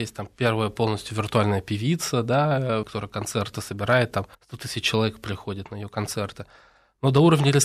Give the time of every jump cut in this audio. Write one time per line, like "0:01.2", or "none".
0:02.8
0:04.3